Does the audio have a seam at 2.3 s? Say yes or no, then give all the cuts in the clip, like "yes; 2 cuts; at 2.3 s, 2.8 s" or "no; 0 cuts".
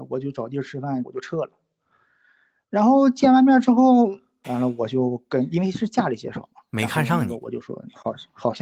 no; 2 cuts; at 1.0 s, 4.4 s